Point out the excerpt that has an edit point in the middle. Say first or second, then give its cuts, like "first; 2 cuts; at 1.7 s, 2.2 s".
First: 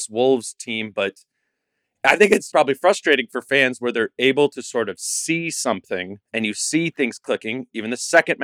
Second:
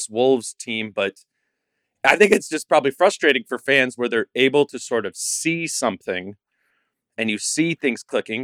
first; 2 cuts; at 2.5 s, 6.2 s